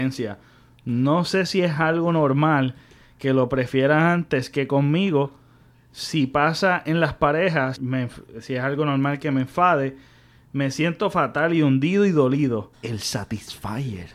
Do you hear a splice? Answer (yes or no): yes